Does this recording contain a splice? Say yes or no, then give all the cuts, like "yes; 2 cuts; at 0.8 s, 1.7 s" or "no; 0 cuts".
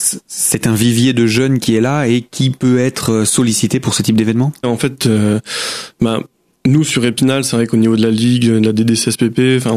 yes; 1 cut; at 4.6 s